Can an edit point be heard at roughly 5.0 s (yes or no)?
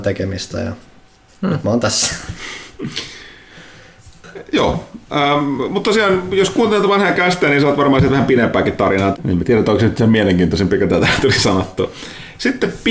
no